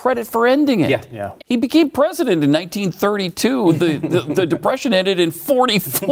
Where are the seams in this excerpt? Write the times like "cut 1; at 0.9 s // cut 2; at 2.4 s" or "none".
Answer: cut 1; at 1.4 s